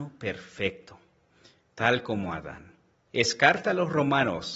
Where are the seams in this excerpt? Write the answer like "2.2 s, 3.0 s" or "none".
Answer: 3.1 s